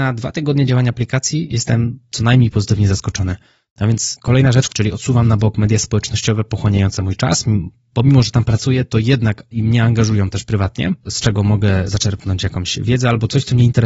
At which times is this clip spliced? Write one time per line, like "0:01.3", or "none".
0:04.7
0:11.0